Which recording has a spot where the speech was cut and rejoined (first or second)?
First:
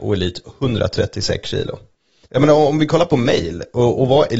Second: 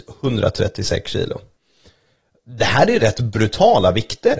first